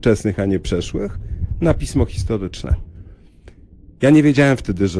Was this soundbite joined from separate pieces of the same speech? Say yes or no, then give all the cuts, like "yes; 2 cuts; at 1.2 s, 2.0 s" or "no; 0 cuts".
no; 0 cuts